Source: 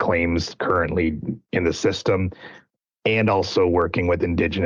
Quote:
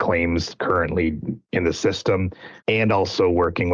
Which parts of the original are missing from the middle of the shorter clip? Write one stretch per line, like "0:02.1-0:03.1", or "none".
0:02.6-0:03.0